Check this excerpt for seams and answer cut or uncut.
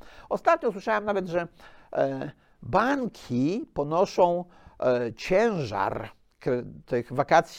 uncut